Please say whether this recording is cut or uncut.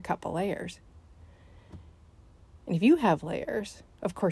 uncut